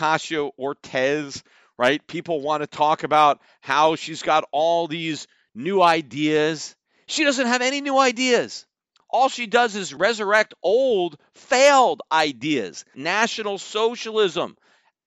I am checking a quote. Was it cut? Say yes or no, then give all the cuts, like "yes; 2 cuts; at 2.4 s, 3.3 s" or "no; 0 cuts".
yes; 1 cut; at 12.9 s